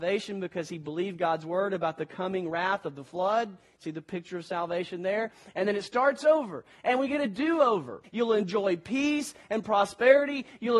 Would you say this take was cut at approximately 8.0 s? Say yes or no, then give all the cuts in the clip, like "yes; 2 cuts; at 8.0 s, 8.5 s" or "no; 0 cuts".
yes; 1 cut; at 8.0 s